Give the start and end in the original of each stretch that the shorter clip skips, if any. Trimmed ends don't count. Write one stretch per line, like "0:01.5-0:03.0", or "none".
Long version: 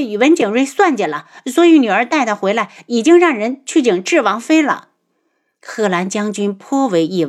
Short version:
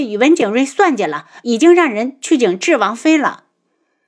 0:01.4-0:02.9